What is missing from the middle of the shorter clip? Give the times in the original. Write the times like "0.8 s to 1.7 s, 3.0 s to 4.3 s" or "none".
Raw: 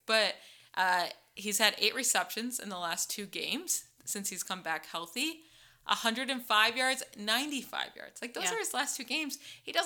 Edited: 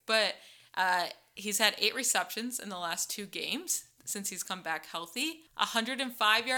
5.5 s to 5.8 s